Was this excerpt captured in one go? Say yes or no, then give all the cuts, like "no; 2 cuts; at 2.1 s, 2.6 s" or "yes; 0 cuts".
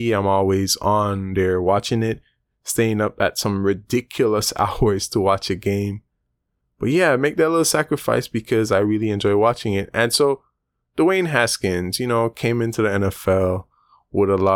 yes; 0 cuts